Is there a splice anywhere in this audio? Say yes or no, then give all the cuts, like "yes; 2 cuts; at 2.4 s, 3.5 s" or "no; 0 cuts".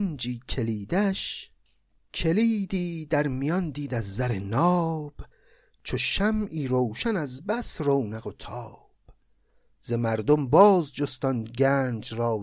no; 0 cuts